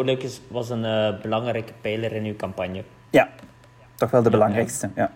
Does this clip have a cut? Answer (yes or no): no